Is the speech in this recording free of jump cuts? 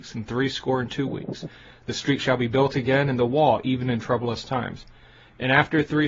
yes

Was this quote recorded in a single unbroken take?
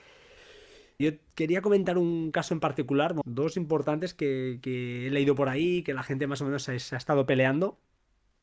no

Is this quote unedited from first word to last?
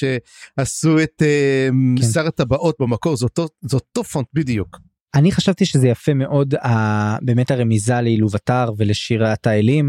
yes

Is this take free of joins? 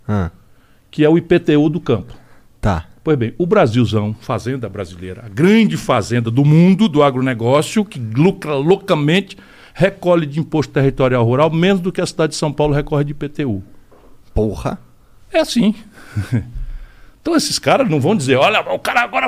yes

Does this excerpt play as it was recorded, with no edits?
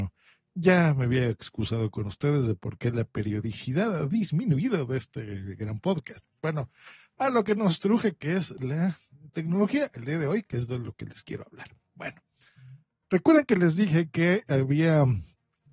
yes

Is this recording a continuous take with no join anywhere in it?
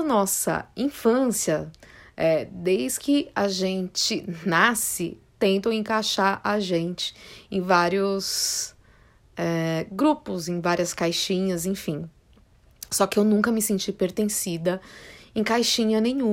yes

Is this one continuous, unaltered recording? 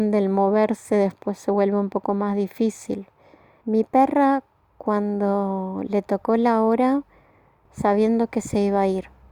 no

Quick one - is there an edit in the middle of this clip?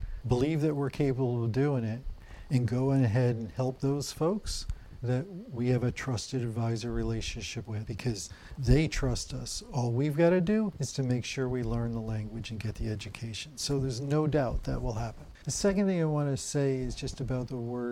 no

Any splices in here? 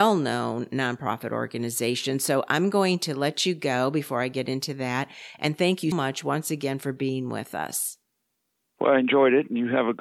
yes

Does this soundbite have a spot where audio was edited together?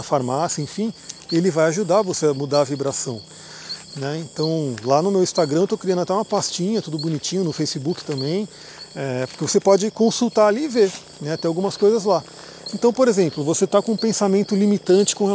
yes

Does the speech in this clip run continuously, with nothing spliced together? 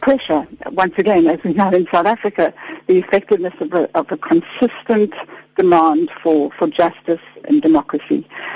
yes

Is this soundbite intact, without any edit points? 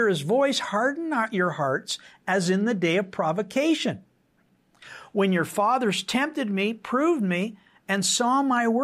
yes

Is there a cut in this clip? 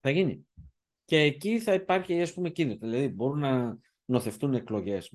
no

